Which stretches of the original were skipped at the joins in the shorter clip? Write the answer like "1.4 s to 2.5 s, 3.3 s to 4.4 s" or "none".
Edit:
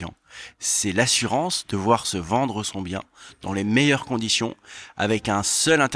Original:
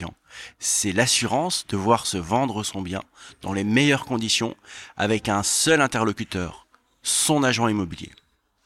none

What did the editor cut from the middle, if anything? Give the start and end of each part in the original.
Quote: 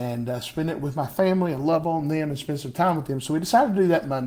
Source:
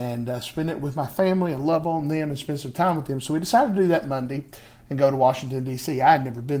none

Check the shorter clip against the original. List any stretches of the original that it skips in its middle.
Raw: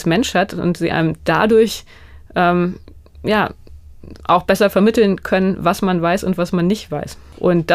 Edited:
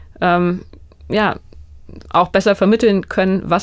none

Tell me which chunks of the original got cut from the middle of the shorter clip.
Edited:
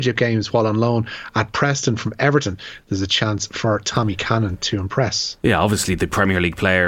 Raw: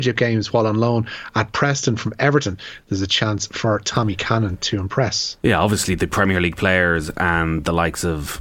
none

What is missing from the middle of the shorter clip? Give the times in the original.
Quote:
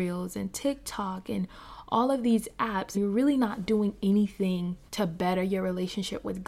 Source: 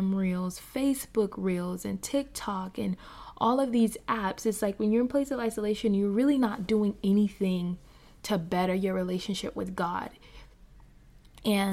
4.4 s to 6.0 s, 7.9 s to 8.2 s

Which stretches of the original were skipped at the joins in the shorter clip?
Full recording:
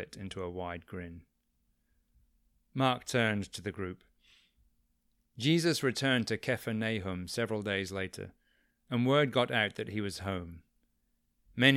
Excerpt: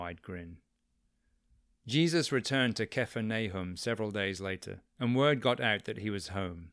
2.4 s to 5.3 s, 8.4 s to 8.8 s

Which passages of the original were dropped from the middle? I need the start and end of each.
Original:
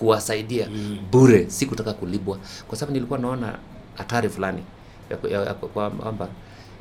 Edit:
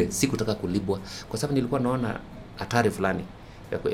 none

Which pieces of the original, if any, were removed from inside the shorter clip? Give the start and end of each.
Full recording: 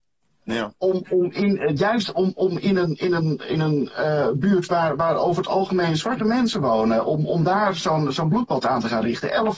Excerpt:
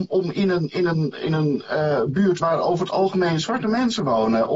4.7 s to 5.0 s

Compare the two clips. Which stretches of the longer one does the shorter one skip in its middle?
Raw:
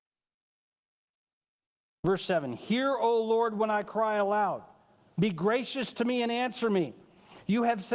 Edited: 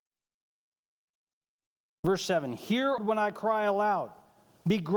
3.0 s to 3.5 s

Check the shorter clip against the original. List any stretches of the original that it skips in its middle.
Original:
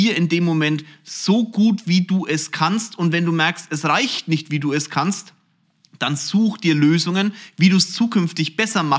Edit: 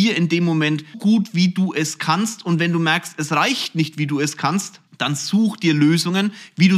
0.9 s to 1.5 s, 5.4 s to 5.9 s

